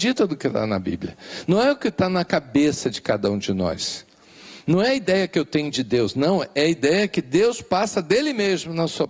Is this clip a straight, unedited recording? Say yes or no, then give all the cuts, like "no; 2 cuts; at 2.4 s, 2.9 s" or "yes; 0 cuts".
yes; 0 cuts